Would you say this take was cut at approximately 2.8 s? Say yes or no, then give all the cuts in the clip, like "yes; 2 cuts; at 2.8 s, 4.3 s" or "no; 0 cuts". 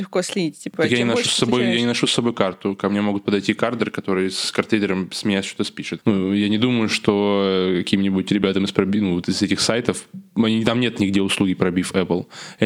no; 1 cut; at 6.0 s